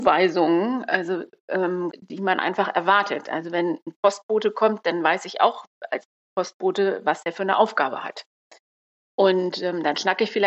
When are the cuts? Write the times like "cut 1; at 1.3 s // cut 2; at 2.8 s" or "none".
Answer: cut 1; at 1.9 s